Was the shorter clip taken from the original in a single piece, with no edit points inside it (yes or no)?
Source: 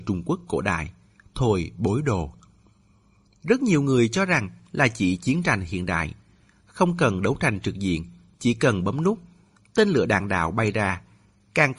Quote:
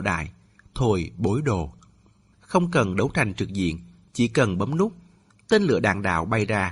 no